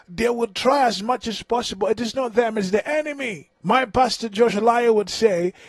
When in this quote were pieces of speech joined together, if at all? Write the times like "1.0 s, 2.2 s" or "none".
3.6 s